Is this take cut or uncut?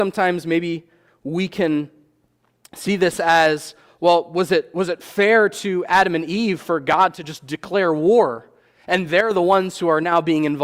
uncut